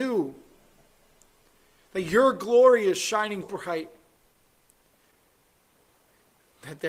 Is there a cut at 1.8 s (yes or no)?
no